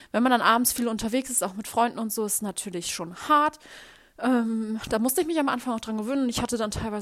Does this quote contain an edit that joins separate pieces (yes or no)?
no